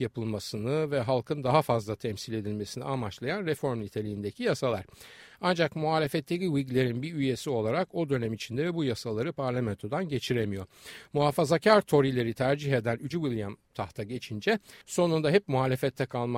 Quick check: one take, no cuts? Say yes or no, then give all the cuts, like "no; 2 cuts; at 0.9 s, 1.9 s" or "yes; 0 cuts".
no; 2 cuts; at 13.1 s, 14.8 s